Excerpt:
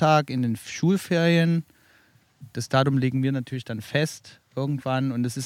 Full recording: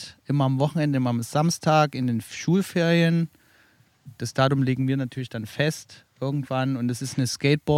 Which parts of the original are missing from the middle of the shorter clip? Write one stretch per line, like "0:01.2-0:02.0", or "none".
none